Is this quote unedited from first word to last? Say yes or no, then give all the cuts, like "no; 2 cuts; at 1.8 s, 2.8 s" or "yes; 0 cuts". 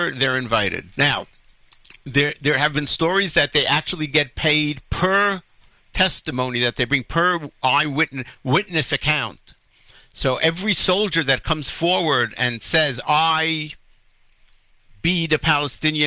no; 1 cut; at 0.9 s